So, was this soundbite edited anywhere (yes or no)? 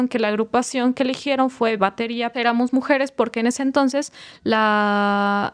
yes